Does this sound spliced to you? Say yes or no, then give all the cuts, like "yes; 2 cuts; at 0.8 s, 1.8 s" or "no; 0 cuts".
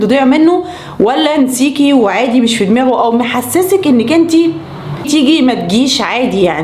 yes; 1 cut; at 5.0 s